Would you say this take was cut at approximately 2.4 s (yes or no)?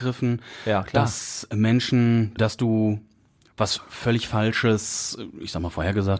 yes